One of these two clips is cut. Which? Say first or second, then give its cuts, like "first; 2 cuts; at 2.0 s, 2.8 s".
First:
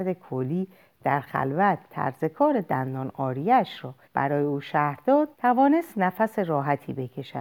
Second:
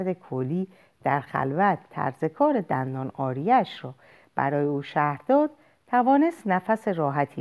first; 2 cuts; at 4.0 s, 5.3 s